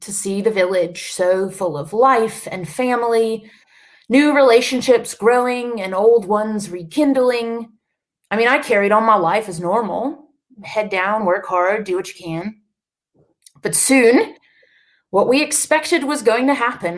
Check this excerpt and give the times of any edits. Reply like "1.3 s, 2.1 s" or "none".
none